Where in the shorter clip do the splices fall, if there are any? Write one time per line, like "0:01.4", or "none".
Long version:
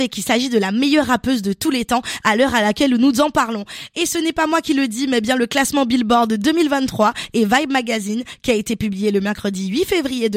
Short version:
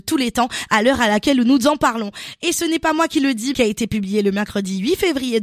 0:03.5